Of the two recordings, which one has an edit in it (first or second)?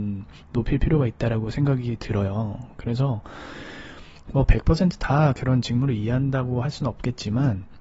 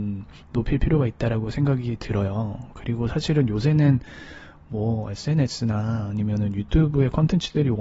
first